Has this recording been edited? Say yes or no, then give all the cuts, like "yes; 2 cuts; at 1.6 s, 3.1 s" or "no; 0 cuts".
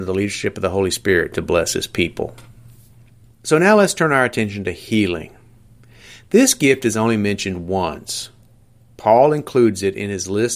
no; 0 cuts